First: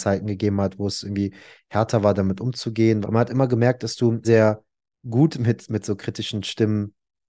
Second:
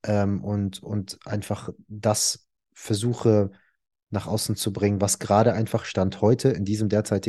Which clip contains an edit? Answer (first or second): first